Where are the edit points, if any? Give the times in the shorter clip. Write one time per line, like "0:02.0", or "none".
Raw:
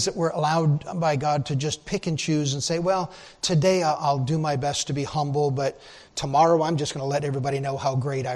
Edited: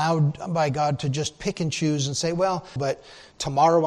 0:02.8